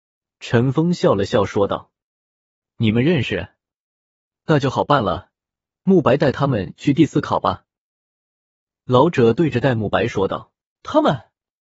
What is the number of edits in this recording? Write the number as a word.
one